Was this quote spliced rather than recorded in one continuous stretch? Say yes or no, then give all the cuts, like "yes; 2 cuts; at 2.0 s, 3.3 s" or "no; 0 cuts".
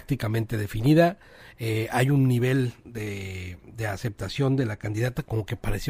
no; 0 cuts